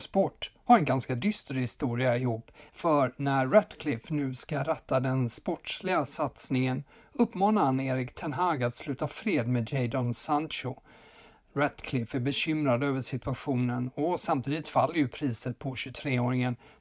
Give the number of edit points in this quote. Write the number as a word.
one